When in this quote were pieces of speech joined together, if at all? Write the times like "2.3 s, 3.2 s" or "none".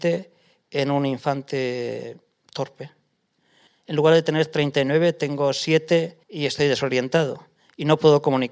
3.7 s, 6.2 s